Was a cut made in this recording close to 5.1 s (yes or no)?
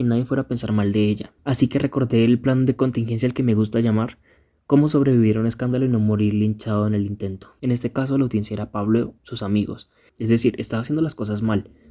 no